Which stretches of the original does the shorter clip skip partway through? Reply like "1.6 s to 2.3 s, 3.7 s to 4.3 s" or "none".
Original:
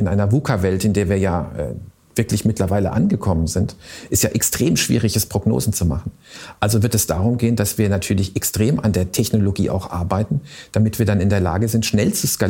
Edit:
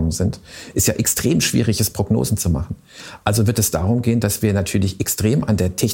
none